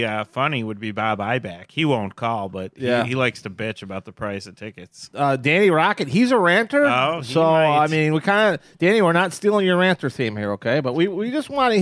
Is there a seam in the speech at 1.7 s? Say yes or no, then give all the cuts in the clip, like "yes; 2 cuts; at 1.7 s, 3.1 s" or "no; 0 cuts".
no; 0 cuts